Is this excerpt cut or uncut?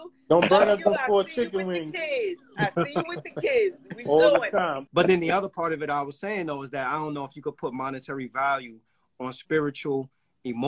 cut